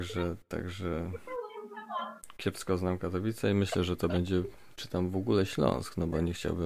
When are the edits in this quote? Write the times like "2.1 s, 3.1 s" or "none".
none

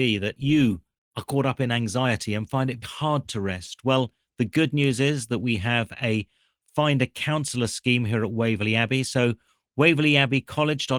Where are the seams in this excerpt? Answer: 2.8 s

